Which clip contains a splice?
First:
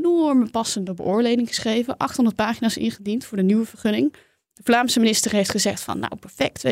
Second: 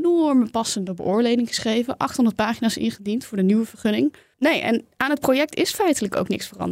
second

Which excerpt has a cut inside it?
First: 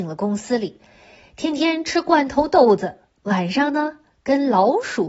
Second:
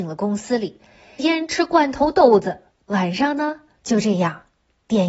second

